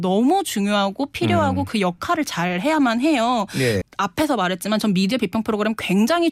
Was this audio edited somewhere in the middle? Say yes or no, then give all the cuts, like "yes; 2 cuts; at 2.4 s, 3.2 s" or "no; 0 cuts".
yes; 1 cut; at 3.8 s